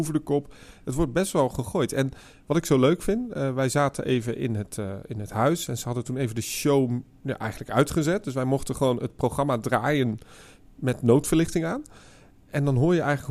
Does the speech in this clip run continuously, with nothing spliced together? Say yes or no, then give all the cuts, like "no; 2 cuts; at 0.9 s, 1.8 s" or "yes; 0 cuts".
yes; 0 cuts